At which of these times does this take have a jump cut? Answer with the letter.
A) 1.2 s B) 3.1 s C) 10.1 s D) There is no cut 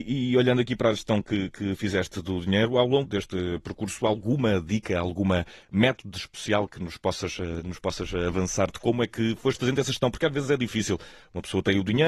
B